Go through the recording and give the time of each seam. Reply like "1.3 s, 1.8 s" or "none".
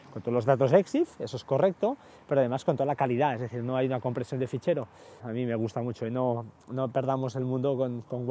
5.2 s